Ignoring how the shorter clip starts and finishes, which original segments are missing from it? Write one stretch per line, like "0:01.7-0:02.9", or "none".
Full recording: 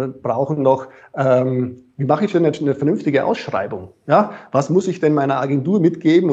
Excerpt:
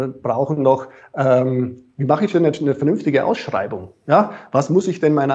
none